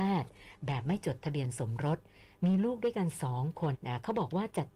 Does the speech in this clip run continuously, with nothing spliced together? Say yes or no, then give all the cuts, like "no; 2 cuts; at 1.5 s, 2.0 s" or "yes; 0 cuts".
no; 1 cut; at 3.7 s